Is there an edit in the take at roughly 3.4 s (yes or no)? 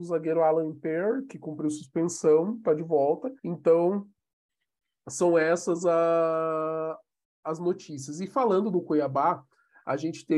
yes